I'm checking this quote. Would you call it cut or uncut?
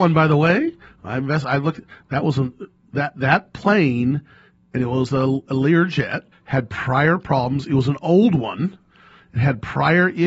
cut